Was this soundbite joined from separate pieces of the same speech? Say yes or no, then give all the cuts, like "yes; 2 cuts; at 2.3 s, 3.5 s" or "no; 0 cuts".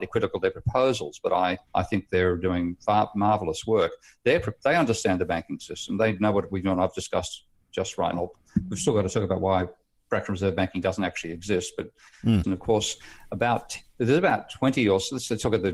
yes; 3 cuts; at 1.7 s, 8.1 s, 12.4 s